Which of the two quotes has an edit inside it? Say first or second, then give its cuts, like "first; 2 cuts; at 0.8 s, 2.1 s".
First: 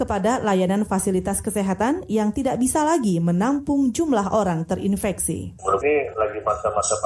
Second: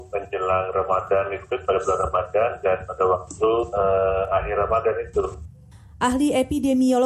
first; 1 cut; at 5.8 s